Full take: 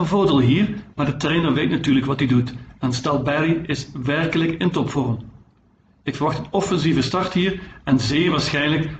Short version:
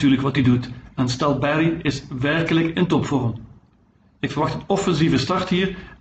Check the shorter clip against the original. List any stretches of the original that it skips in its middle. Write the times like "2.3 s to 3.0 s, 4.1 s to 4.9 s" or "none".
none